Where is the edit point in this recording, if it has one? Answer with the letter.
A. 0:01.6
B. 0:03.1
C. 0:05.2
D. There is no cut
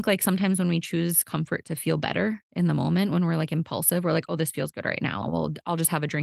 C